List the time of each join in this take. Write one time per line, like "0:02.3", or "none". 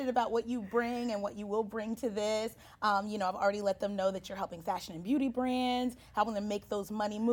none